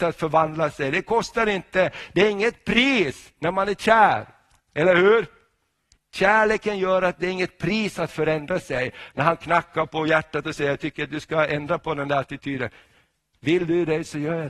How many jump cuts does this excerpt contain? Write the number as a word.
one